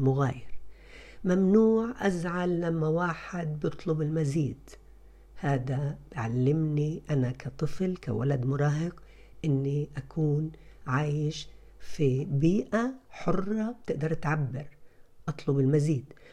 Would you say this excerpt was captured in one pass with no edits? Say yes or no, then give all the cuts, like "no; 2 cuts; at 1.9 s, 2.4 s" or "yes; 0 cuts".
yes; 0 cuts